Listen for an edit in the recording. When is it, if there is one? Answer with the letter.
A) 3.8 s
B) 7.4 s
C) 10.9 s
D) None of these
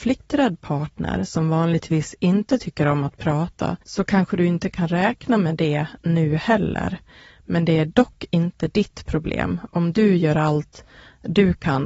A